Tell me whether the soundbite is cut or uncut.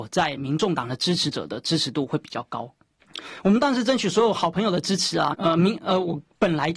cut